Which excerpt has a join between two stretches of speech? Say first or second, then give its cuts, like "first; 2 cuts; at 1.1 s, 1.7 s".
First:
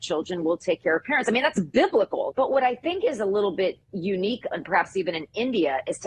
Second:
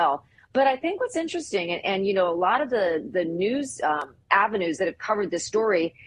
first; 2 cuts; at 2.3 s, 4.5 s